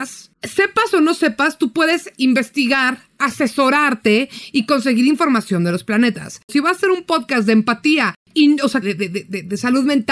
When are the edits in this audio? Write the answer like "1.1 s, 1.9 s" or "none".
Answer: 6.5 s, 8.8 s